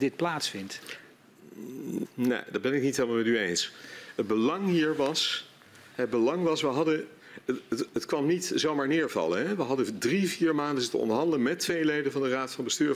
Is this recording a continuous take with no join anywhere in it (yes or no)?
no